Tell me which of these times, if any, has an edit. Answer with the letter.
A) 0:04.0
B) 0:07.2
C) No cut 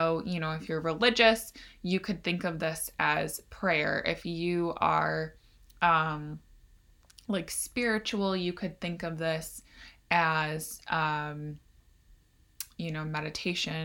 C